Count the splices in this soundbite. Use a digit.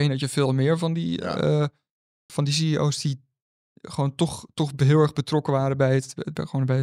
1